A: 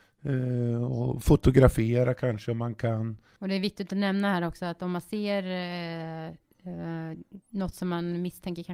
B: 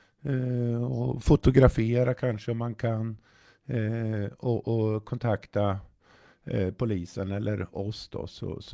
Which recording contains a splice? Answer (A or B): A